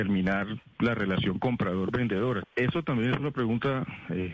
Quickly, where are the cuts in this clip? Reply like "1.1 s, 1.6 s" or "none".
2.4 s